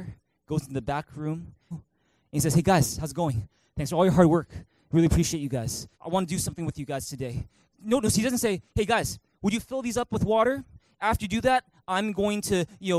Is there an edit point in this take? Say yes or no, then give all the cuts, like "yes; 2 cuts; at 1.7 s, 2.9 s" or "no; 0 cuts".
yes; 3 cuts; at 1.7 s, 5.9 s, 7.7 s